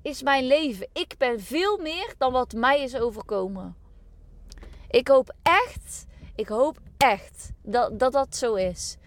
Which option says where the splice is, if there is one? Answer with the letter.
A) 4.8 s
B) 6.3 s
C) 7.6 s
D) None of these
C